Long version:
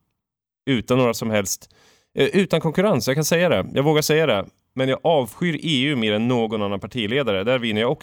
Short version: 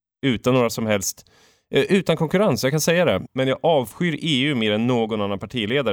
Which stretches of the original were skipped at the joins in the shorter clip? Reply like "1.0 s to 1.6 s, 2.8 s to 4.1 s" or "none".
3.7 s to 4.7 s